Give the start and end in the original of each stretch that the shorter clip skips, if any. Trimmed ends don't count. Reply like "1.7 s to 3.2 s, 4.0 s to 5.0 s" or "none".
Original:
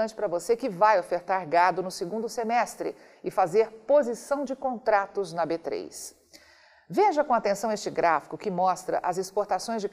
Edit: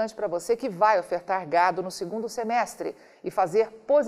none